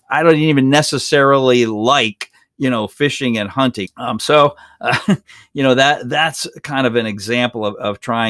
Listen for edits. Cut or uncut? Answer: cut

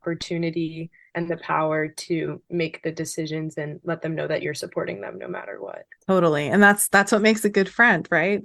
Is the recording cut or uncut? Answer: cut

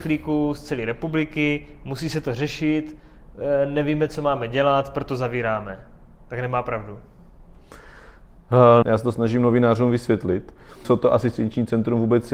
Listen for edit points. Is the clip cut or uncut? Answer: cut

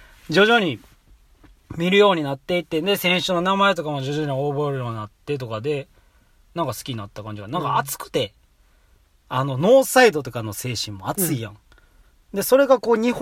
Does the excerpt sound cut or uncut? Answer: uncut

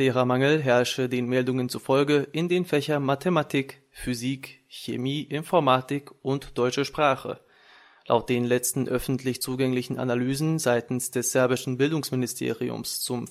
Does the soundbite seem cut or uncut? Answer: uncut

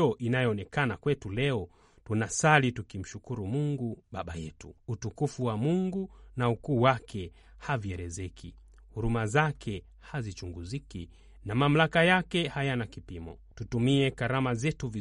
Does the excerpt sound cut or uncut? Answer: uncut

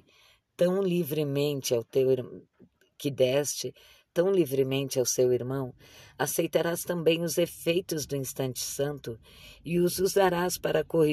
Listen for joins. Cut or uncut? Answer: uncut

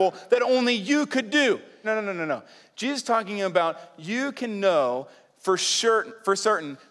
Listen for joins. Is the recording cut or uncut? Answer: cut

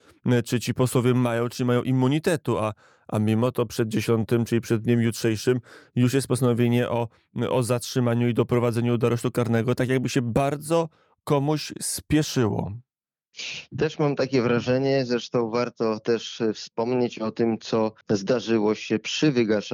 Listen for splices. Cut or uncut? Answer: cut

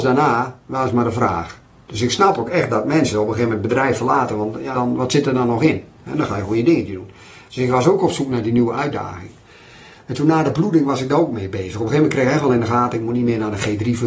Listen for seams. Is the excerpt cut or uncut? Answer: cut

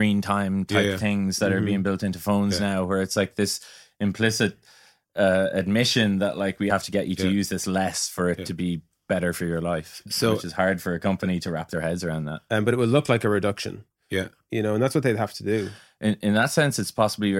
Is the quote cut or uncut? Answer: cut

